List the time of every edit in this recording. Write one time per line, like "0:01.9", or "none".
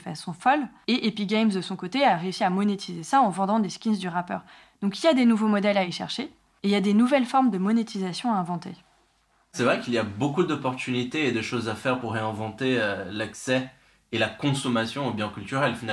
none

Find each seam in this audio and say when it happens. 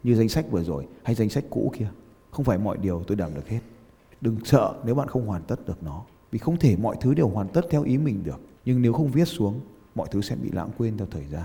0:04.1

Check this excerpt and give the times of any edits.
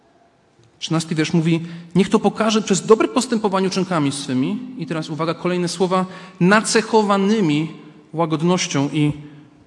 none

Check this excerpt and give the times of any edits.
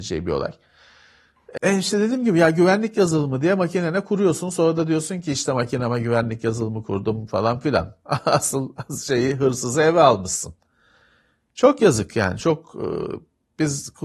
0:01.6

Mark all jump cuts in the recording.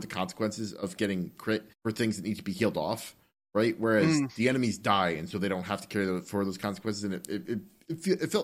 0:01.7

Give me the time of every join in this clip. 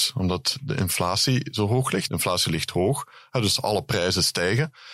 0:02.1

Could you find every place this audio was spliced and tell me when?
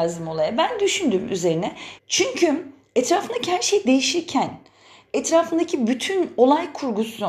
0:02.0

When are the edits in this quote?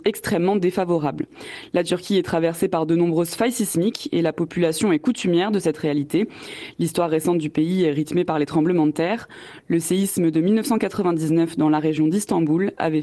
none

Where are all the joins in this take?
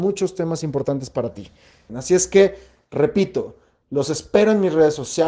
0:01.9

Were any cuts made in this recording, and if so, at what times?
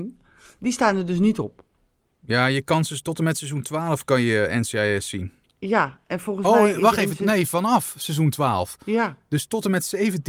none

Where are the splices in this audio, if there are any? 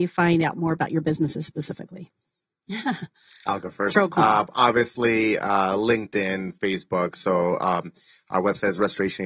none

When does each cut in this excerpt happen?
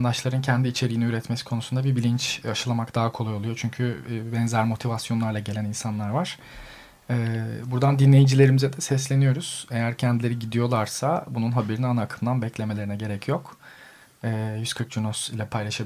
none

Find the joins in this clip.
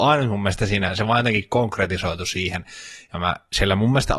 none

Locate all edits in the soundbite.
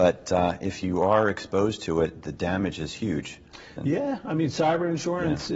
0:03.8

